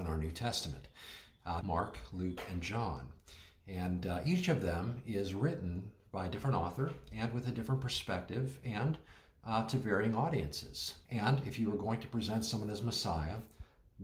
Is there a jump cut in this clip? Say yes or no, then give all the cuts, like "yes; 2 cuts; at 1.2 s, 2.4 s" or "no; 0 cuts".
yes; 2 cuts; at 1.6 s, 11.0 s